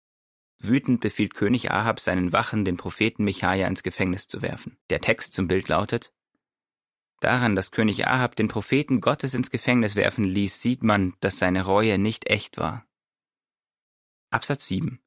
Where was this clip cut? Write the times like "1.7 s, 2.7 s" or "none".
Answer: 4.8 s